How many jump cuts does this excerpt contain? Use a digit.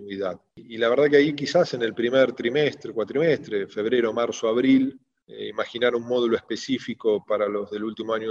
0